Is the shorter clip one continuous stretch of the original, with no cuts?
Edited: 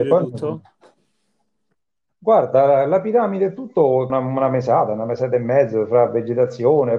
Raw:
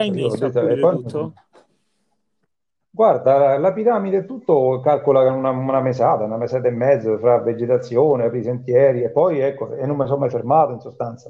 no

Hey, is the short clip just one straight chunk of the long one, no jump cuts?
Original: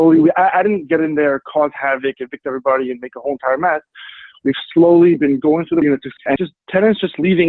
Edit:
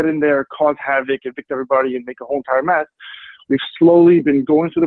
yes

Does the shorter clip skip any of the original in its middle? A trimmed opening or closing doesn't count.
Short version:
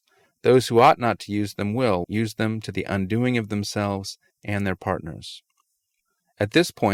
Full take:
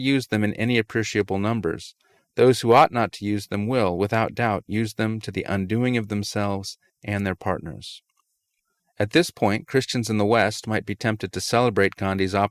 yes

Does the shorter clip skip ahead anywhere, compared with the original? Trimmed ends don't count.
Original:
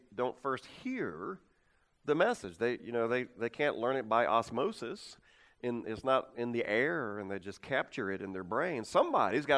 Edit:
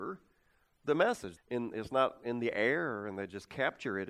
yes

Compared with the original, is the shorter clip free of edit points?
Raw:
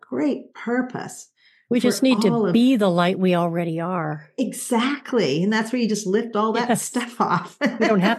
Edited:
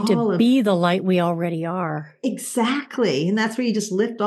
yes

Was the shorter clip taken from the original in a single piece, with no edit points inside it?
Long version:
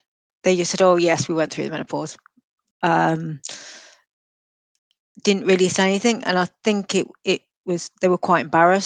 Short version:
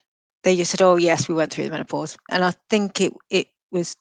no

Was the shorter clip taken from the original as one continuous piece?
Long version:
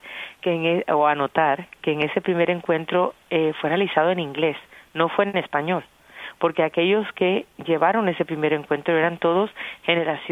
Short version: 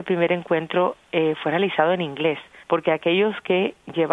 no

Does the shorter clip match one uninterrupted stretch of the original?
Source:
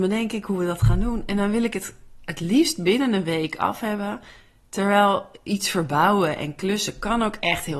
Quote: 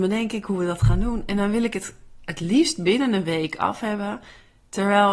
yes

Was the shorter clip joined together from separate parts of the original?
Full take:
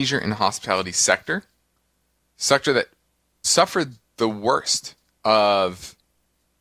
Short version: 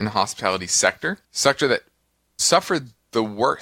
yes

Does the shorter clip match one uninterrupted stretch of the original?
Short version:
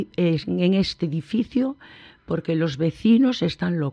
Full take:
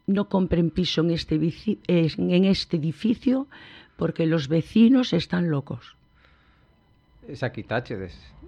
yes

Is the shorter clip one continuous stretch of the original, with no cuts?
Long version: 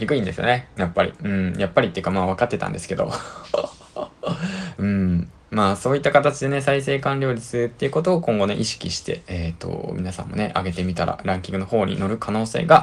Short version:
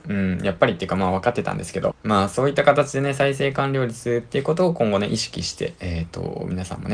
no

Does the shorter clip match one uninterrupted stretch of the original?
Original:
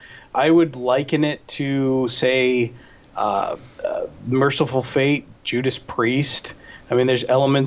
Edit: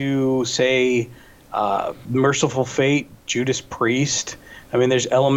no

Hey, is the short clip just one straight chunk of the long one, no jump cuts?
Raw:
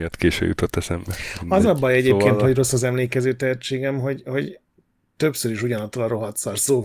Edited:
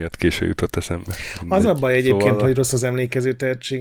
yes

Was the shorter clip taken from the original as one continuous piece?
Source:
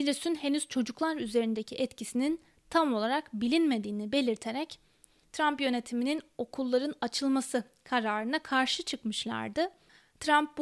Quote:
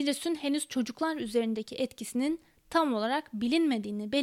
yes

